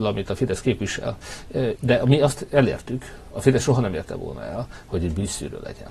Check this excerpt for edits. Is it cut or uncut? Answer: cut